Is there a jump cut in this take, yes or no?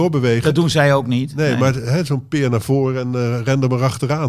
no